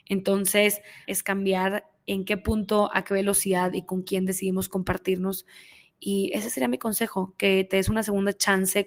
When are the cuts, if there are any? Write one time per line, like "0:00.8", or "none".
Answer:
0:01.0